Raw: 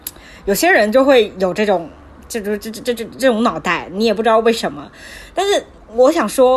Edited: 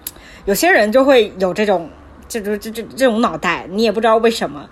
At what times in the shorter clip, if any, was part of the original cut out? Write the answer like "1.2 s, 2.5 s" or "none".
2.7 s